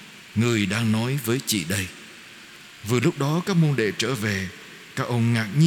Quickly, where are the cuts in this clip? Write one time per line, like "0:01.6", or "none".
none